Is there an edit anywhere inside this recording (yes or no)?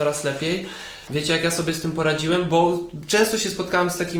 yes